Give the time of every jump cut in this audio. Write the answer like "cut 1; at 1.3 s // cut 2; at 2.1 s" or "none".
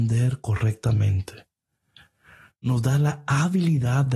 none